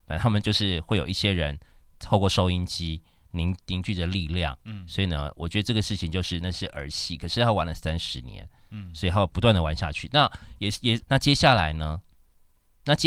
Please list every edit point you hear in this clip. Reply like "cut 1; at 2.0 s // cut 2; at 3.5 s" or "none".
cut 1; at 6.4 s // cut 2; at 11.0 s